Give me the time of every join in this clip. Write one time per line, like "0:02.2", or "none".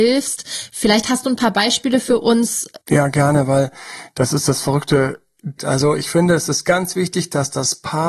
0:02.8
0:05.6